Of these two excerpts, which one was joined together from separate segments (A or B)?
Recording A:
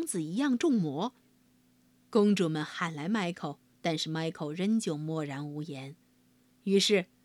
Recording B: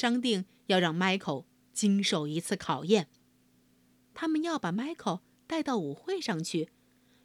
A